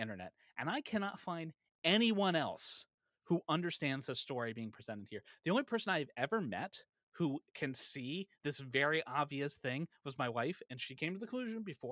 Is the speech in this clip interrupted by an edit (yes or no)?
no